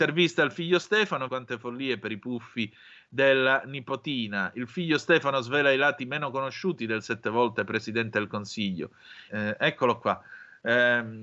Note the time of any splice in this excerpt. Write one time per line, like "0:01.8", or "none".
0:01.3
0:09.3